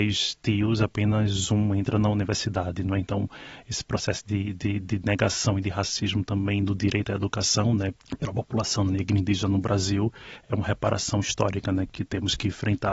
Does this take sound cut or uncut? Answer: uncut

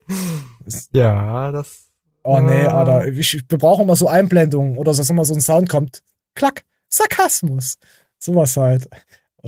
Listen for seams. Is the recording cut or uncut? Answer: cut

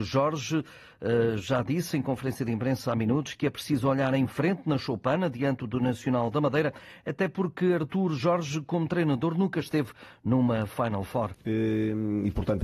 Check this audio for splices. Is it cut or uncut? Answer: cut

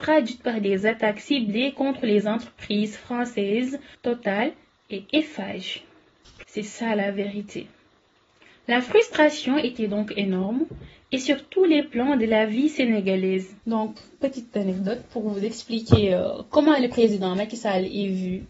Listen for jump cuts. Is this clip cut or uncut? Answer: cut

